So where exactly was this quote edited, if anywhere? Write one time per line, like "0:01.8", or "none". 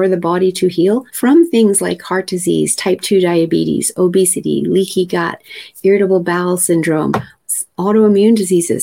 0:01.1